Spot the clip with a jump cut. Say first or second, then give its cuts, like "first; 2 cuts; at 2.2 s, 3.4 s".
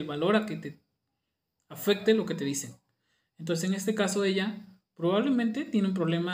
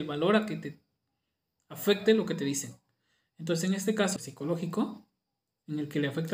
second; 1 cut; at 4.2 s